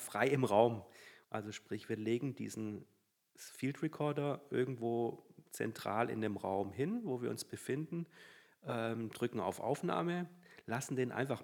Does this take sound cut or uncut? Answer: cut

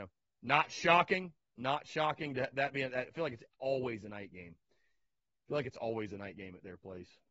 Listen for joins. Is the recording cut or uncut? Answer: uncut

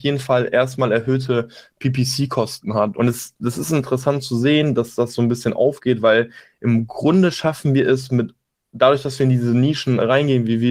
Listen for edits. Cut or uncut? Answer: cut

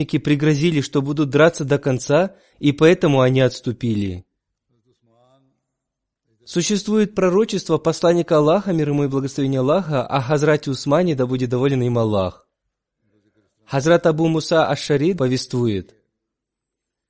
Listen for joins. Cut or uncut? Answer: cut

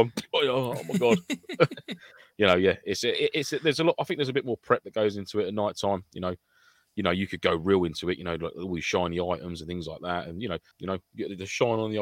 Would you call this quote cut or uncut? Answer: cut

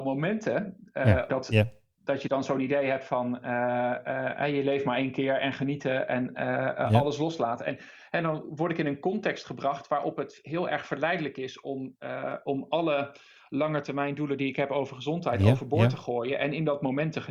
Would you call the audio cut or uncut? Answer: cut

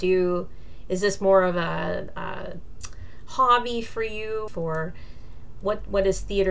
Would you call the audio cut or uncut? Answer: cut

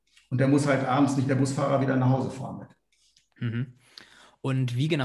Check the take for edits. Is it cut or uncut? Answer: uncut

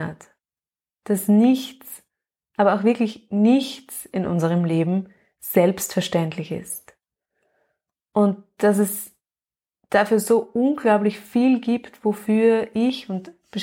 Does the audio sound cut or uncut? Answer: uncut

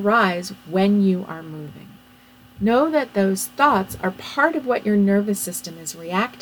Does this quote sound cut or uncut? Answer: uncut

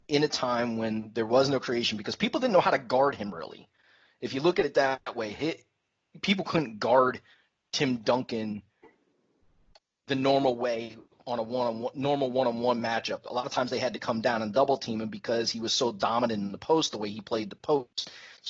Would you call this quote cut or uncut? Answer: uncut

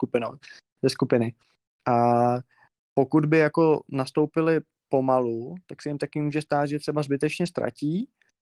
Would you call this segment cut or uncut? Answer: uncut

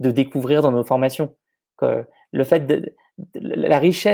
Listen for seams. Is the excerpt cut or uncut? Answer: uncut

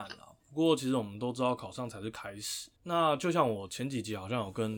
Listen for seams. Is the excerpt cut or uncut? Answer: cut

